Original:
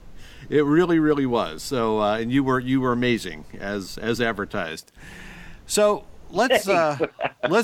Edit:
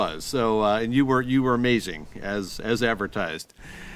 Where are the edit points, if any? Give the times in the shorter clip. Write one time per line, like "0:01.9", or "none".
none